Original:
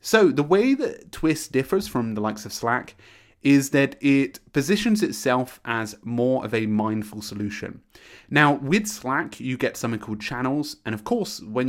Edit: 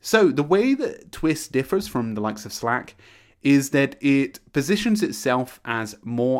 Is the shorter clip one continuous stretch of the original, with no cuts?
yes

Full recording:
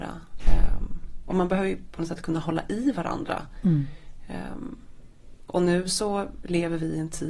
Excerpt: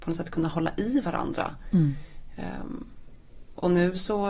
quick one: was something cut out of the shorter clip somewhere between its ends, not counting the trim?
no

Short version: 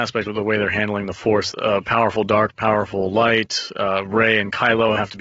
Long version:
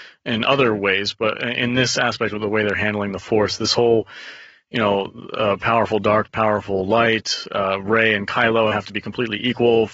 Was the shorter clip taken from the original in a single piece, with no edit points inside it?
no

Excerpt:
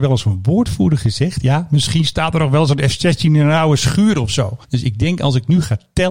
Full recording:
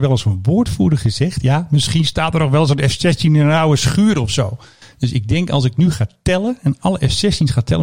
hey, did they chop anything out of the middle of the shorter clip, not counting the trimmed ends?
yes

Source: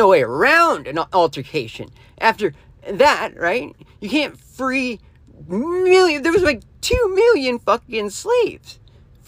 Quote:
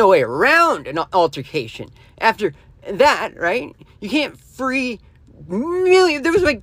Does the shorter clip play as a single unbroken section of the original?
yes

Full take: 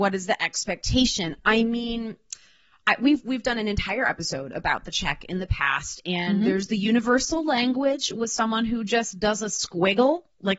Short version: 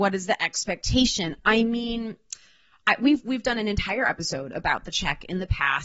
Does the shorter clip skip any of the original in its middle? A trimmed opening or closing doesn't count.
no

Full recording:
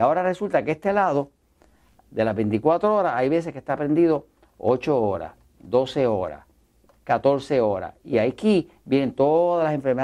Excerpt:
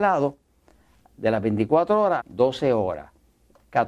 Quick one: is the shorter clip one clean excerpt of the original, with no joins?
no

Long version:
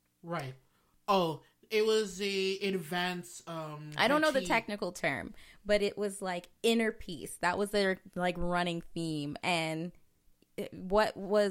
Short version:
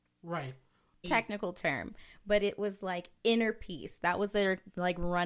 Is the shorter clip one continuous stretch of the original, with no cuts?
no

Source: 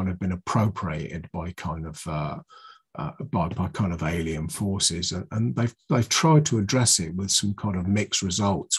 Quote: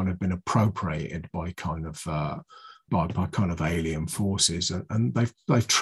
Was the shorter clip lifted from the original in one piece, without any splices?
no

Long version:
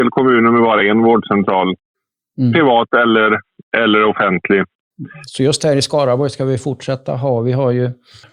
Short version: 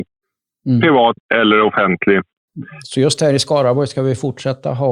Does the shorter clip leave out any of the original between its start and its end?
yes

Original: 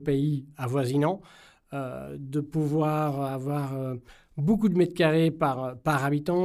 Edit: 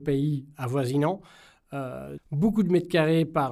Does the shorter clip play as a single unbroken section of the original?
no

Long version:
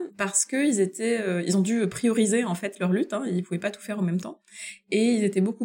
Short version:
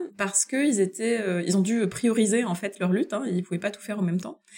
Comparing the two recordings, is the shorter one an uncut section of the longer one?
yes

